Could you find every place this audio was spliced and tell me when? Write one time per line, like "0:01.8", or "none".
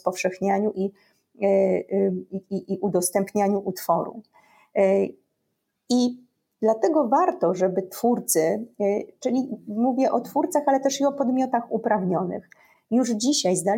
none